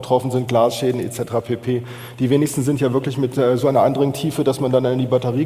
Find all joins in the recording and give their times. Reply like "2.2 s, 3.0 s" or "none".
none